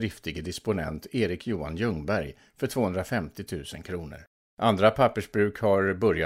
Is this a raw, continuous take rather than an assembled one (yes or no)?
no